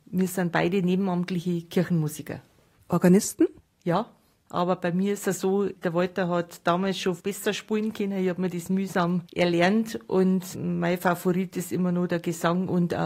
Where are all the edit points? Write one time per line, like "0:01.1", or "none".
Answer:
none